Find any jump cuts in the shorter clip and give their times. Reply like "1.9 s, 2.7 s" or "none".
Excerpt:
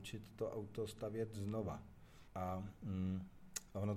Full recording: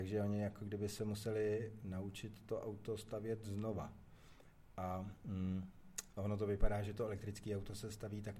2.3 s